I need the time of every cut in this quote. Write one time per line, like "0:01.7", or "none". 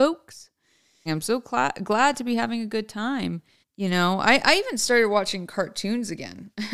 0:01.1
0:03.6